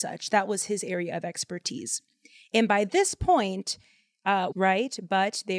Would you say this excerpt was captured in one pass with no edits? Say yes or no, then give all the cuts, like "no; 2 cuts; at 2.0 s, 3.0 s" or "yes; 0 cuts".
no; 1 cut; at 4.5 s